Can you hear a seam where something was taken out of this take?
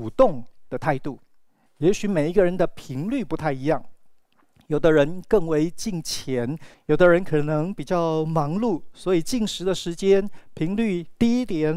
yes; 2 cuts; at 1.7 s, 6.7 s

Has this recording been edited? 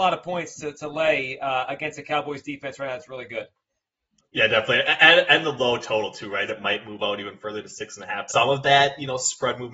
yes; 2 cuts; at 6.5 s, 8.3 s

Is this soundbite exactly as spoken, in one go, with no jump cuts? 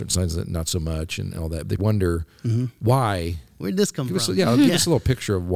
no; 1 cut; at 1.8 s

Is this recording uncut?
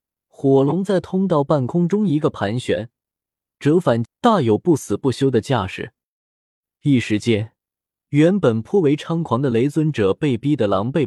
no; 1 cut; at 4.1 s

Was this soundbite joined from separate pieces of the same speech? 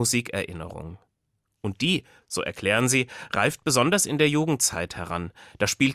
no; 0 cuts

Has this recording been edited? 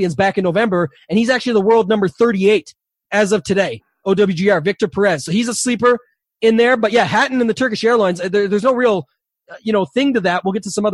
no; 0 cuts

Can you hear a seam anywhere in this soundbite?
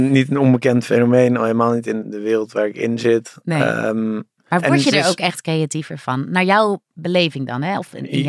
yes; 1 cut; at 2.0 s

